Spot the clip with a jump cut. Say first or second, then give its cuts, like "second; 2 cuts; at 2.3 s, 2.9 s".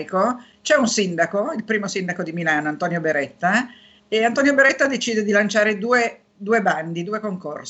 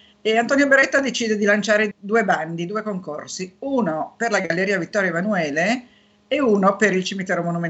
second; 1 cut; at 1.9 s